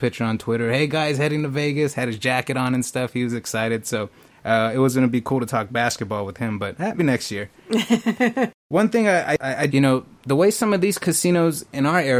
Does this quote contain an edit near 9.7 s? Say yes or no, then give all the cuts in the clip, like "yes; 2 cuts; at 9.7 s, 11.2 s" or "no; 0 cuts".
yes; 2 cuts; at 7.0 s, 9.7 s